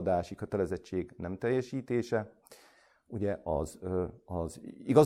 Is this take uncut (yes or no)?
yes